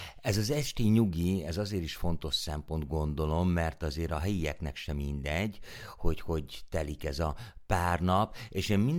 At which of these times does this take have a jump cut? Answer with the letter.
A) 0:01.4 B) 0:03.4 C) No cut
C